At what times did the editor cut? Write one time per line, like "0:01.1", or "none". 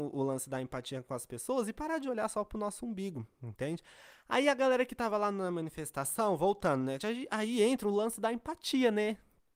0:07.0